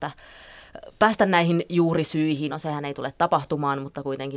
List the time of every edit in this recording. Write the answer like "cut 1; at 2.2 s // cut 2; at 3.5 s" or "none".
cut 1; at 2.5 s